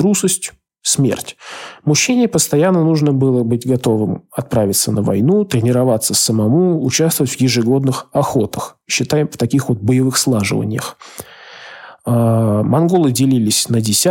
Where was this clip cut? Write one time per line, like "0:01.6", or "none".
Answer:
none